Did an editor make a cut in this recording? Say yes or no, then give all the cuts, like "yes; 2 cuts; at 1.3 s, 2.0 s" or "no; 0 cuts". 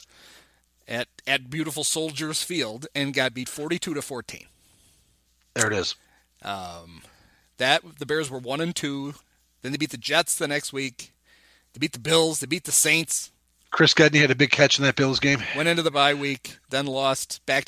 no; 0 cuts